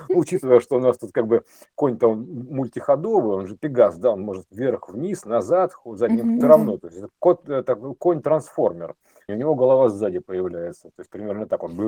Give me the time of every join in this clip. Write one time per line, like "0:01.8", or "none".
0:06.4
0:09.3